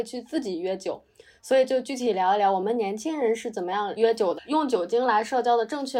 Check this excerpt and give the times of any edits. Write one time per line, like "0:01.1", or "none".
0:04.4